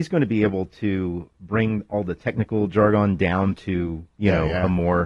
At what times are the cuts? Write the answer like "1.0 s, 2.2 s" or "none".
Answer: none